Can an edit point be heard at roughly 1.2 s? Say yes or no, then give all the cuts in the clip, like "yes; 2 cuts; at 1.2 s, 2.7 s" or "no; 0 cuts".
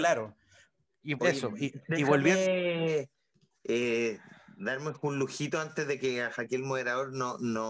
yes; 1 cut; at 1.2 s